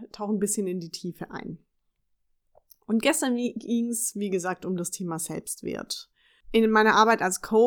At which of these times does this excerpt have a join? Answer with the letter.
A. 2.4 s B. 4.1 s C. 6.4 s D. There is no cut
D